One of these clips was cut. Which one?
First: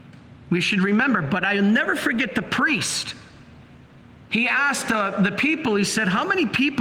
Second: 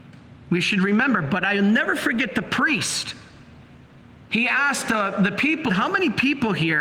second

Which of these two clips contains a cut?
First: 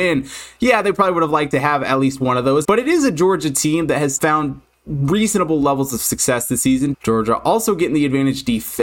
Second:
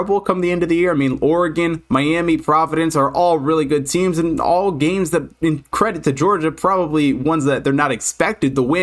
first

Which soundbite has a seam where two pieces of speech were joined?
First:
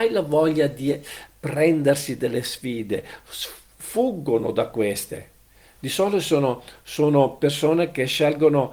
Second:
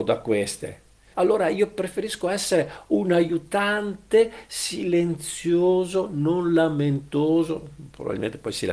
second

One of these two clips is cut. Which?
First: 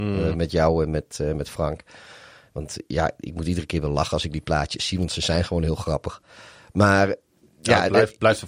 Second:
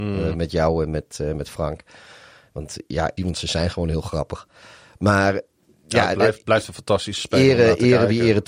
second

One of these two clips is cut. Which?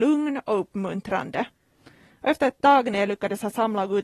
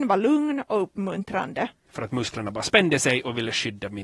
second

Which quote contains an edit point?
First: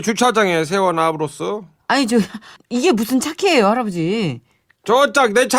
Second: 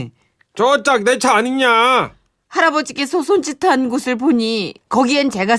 first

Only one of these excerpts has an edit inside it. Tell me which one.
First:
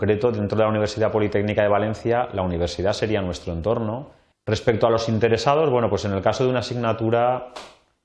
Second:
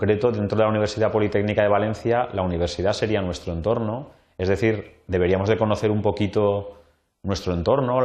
first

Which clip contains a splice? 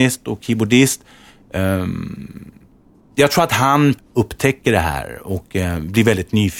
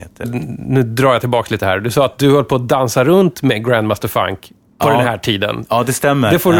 first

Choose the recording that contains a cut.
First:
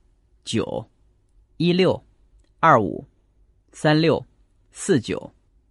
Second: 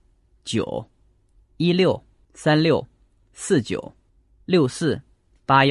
second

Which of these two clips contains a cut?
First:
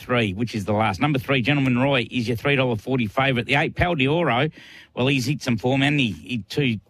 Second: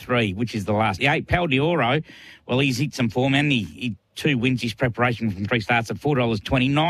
second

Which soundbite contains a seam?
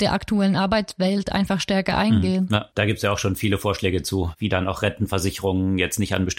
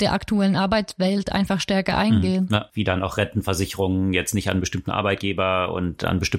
second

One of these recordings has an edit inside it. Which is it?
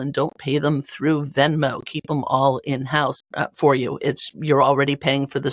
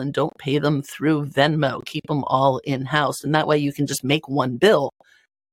first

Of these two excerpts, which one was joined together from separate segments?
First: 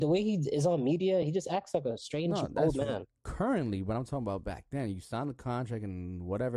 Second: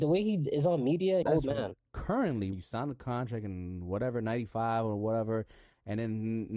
second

